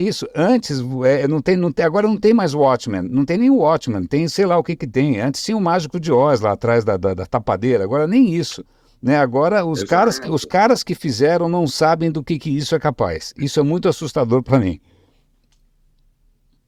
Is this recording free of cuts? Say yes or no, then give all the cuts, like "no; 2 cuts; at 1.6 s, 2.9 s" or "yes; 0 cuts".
yes; 0 cuts